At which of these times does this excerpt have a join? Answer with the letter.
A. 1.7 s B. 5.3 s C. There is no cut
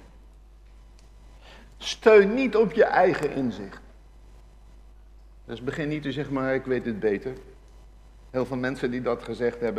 C